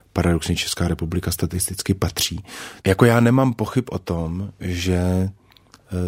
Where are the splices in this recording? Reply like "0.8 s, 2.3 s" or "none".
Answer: 2.8 s